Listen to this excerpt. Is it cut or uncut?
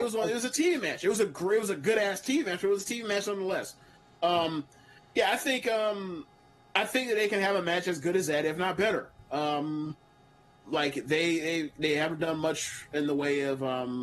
uncut